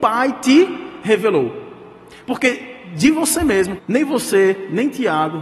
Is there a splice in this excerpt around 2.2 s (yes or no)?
no